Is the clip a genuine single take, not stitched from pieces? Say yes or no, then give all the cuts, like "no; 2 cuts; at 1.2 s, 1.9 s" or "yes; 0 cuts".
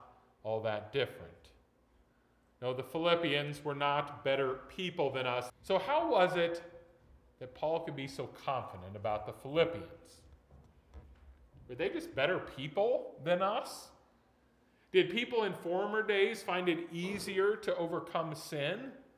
no; 1 cut; at 5.5 s